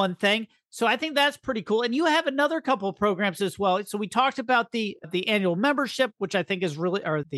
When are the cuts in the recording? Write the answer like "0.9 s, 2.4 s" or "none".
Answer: none

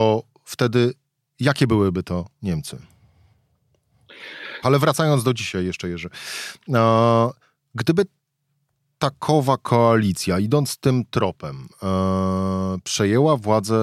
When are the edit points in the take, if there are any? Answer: 4.6 s

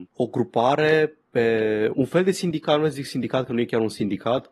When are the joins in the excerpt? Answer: 1.9 s

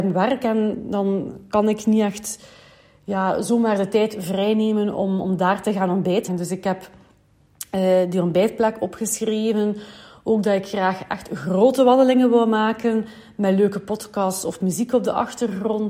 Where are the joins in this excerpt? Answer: 6.3 s

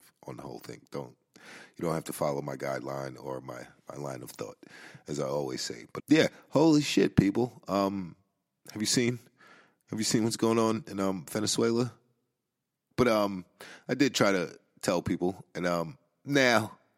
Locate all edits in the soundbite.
6.0 s, 12.9 s

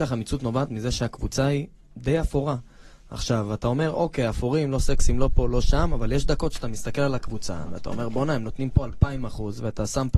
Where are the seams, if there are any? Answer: none

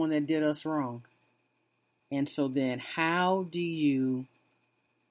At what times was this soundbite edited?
2.0 s

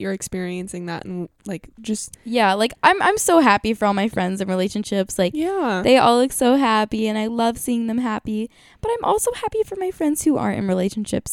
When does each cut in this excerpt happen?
2.1 s

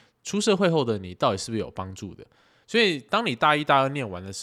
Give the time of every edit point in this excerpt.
2.6 s

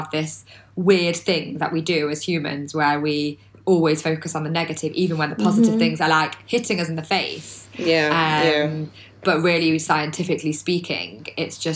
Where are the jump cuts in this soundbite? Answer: none

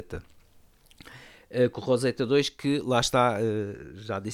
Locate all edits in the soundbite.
none

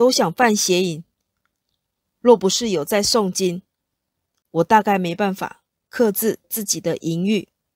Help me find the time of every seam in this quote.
none

